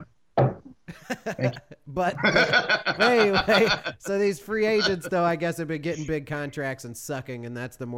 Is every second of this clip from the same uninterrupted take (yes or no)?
yes